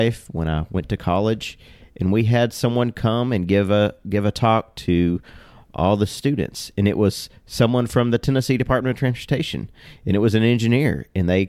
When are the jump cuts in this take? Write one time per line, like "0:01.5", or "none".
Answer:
none